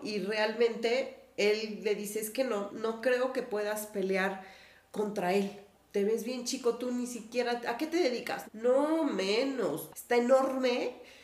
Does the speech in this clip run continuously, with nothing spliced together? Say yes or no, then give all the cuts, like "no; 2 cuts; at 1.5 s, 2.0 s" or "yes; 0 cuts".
no; 2 cuts; at 8.4 s, 9.9 s